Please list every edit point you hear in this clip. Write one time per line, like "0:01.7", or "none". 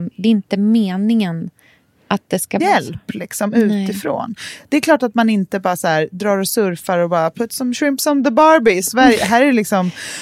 0:02.6